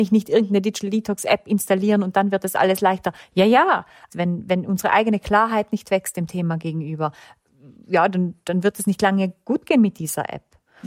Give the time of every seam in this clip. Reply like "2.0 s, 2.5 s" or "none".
4.1 s

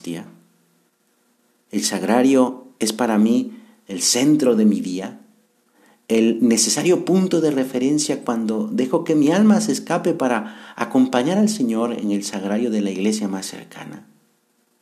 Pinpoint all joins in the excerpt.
none

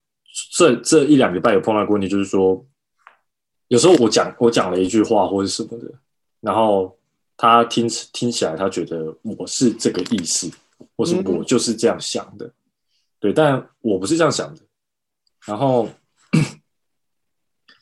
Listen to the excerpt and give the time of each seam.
4.0 s

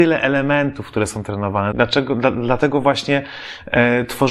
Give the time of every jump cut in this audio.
1.7 s

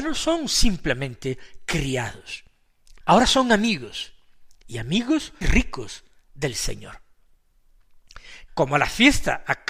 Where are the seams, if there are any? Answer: 3.0 s, 5.4 s, 8.5 s

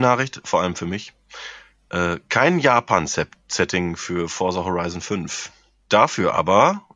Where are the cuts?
5.8 s

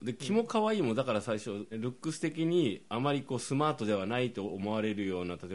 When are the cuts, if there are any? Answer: 1.7 s

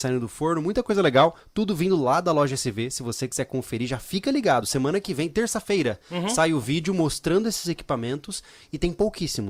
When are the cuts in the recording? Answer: none

